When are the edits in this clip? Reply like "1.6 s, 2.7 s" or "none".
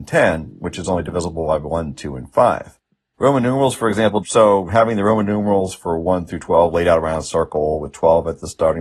3.1 s, 4.2 s